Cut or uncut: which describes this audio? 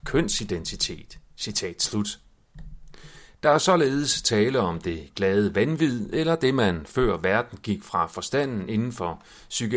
uncut